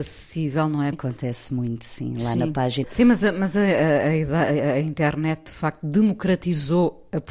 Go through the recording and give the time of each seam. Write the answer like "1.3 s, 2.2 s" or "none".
0.9 s, 2.8 s